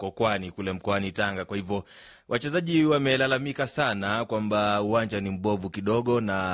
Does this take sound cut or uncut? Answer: uncut